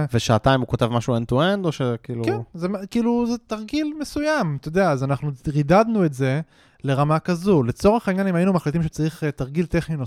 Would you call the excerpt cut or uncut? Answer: uncut